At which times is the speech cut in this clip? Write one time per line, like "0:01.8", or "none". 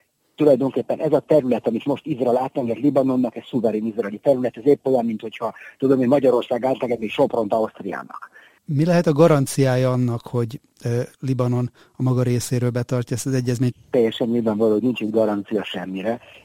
0:08.6
0:13.7